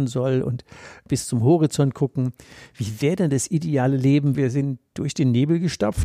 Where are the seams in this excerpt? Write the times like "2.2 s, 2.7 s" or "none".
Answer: 4.3 s